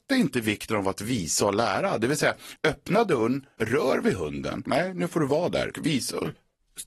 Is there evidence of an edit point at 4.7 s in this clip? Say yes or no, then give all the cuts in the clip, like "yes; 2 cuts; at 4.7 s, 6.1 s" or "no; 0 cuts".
yes; 2 cuts; at 4.7 s, 5.7 s